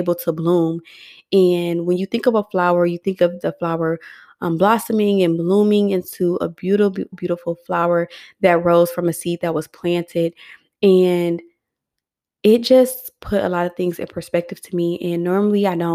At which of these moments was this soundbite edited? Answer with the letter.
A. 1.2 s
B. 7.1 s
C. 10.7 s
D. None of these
B